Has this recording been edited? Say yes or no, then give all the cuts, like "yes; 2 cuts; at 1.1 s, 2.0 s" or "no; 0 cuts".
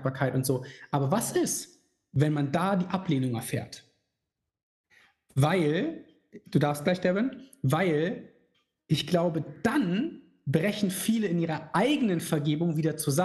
no; 0 cuts